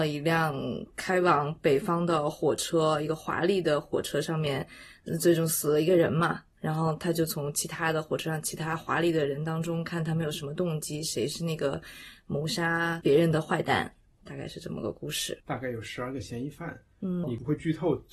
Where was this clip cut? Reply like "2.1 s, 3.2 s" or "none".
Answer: 15.4 s, 17.2 s